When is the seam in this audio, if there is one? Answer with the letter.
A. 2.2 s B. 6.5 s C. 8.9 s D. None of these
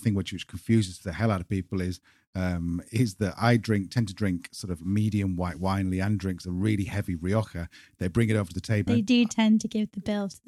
C